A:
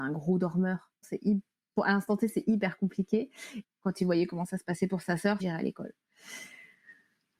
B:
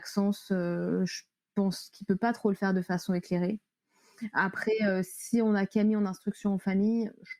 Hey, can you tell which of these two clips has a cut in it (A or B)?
A